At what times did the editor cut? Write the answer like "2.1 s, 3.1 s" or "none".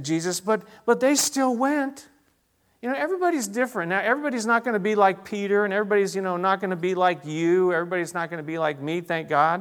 none